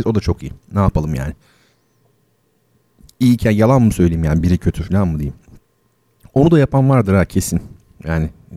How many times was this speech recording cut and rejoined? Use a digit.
0